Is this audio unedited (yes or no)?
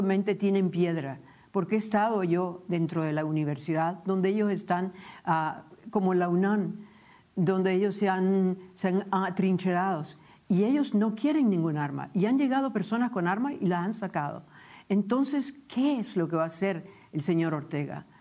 yes